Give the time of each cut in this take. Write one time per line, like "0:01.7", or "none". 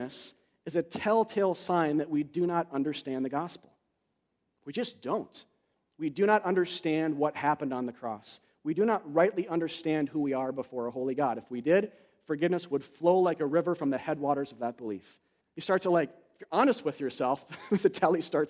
0:15.4